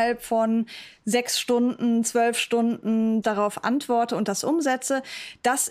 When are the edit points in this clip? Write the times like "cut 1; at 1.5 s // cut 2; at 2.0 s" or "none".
cut 1; at 3.2 s